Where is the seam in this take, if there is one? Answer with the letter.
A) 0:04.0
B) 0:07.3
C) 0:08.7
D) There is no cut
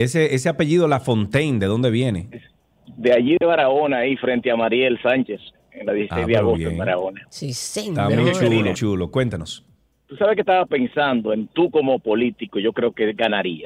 C